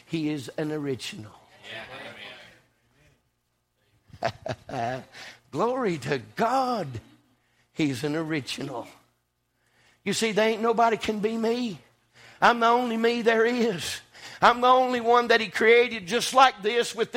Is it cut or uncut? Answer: uncut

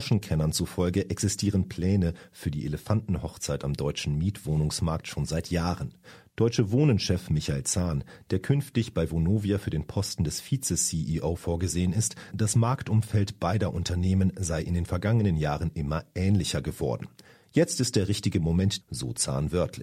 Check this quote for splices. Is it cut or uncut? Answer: cut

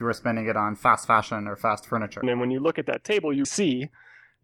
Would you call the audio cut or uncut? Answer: cut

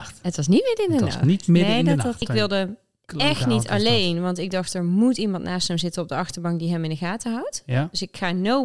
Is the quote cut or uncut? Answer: cut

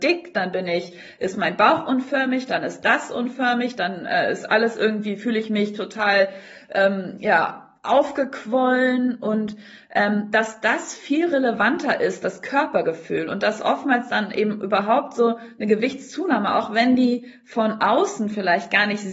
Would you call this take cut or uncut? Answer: uncut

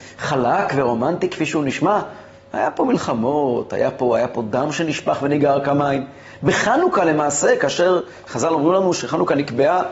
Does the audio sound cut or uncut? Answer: uncut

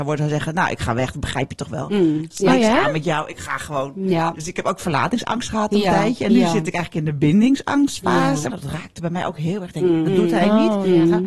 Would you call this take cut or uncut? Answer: cut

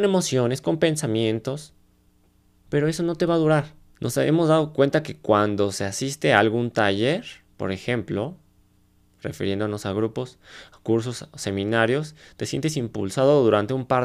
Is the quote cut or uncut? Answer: cut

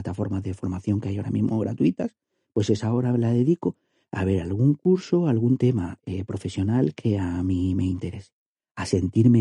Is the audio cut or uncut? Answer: uncut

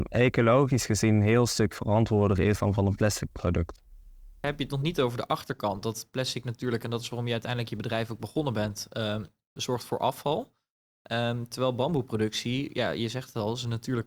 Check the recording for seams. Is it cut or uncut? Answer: uncut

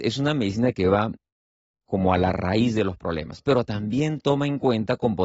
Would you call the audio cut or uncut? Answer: uncut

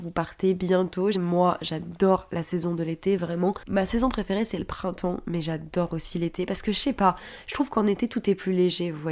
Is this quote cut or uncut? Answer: cut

